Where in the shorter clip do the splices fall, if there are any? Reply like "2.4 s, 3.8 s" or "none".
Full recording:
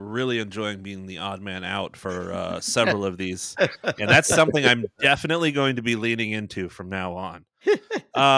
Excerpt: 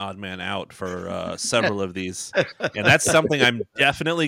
none